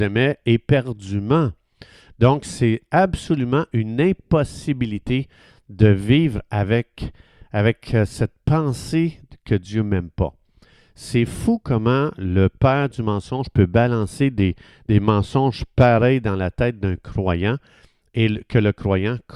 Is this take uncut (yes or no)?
yes